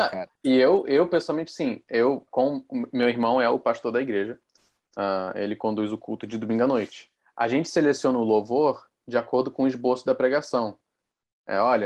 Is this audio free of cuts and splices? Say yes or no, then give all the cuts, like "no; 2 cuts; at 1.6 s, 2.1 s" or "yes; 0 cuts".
no; 1 cut; at 2.3 s